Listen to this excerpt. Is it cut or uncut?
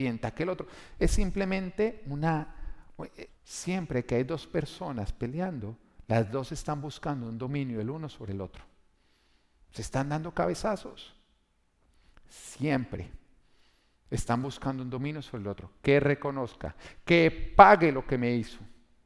cut